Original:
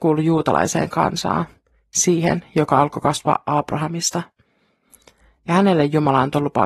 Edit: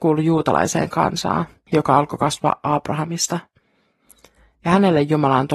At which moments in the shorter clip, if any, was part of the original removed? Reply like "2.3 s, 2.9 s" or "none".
1.7 s